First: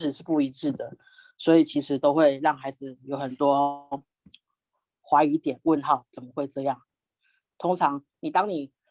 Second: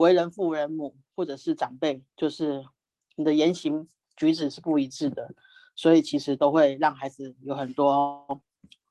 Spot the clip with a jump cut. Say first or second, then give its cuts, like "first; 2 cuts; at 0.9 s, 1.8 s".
second; 1 cut; at 2.1 s